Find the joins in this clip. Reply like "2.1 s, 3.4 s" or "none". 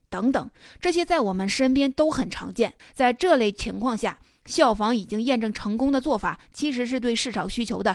2.8 s